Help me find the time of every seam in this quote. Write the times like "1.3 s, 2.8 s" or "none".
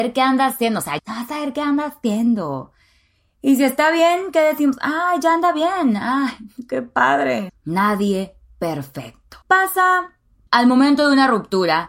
1.0 s, 7.5 s, 9.4 s